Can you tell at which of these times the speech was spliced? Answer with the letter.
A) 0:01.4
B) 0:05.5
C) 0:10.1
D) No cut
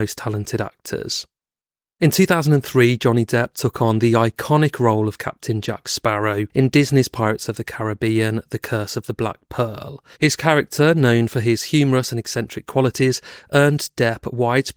C